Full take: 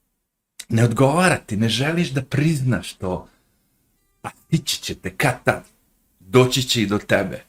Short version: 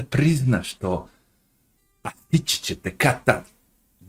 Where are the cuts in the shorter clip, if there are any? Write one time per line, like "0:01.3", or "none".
none